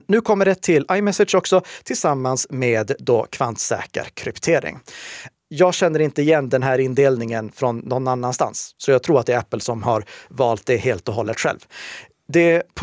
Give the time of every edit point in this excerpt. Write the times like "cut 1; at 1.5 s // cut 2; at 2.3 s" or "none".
cut 1; at 5.3 s